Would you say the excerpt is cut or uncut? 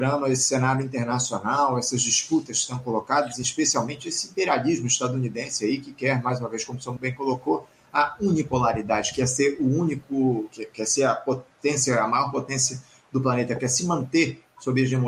cut